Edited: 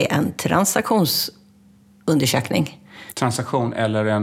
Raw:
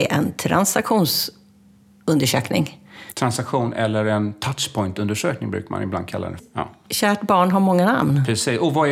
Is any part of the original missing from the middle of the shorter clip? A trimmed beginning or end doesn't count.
no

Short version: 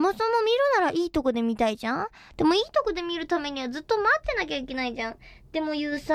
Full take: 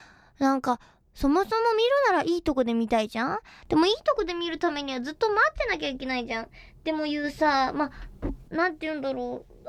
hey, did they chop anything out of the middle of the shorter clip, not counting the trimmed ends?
no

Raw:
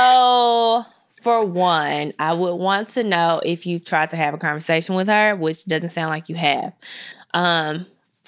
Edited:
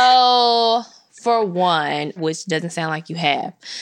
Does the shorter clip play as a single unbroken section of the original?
no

